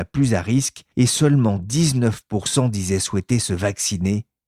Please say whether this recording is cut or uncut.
cut